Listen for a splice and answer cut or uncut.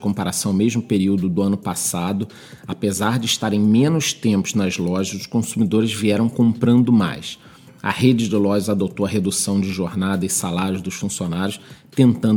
uncut